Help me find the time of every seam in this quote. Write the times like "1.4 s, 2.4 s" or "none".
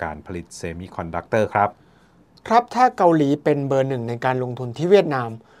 none